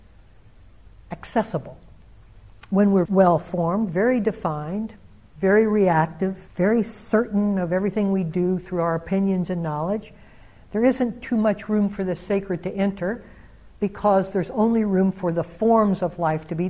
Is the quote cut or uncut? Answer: cut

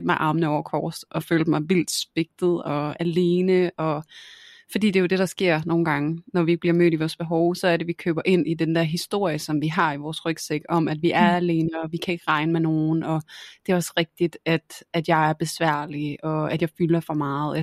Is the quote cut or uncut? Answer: uncut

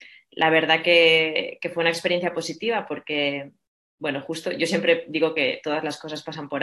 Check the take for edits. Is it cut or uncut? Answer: uncut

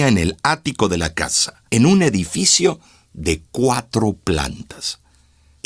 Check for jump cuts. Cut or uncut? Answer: cut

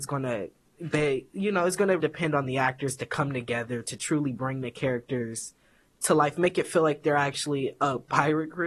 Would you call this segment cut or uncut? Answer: cut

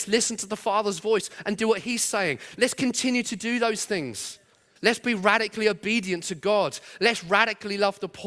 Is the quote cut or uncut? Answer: cut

